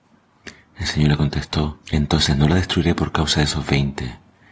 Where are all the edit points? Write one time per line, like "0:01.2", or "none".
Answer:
0:01.8